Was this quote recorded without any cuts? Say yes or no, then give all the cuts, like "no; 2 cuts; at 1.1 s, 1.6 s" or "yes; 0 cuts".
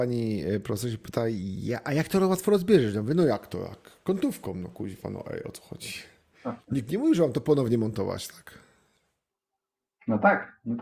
yes; 0 cuts